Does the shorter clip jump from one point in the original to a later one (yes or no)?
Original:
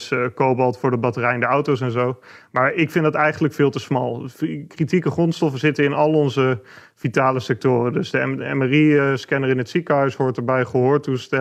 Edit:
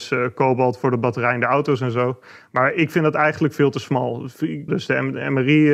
yes